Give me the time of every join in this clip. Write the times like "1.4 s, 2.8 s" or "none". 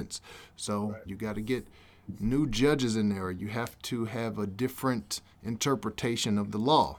1.1 s